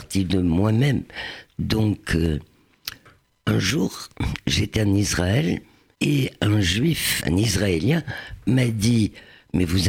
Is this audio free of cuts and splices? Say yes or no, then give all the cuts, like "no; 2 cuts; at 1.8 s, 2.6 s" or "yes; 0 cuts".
no; 2 cuts; at 5.9 s, 7.2 s